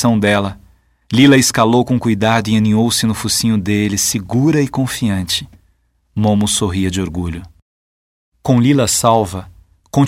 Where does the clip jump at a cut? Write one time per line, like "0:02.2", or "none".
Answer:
none